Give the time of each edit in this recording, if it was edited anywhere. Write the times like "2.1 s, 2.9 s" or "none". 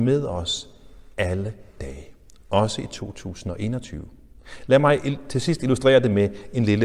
none